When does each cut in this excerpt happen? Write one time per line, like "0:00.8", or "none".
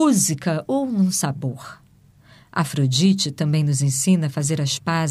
none